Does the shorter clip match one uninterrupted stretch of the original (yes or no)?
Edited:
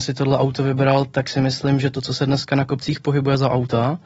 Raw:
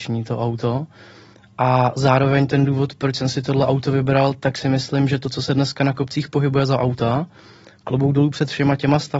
yes